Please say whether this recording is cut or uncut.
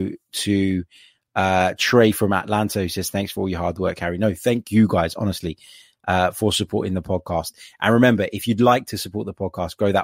uncut